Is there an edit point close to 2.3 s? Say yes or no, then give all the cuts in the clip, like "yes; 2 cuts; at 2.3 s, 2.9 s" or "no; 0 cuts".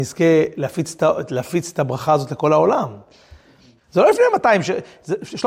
no; 1 cut; at 3.8 s